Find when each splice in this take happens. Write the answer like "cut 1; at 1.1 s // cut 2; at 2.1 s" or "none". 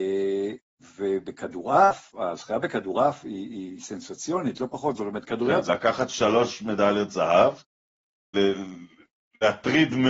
cut 1; at 5.6 s // cut 2; at 8.3 s